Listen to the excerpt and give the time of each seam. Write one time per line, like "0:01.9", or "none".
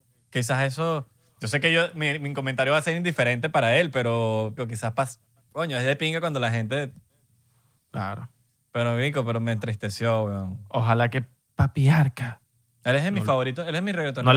0:04.6